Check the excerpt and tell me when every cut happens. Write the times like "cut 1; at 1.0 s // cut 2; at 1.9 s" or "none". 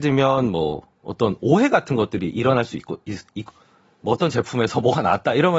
cut 1; at 3.5 s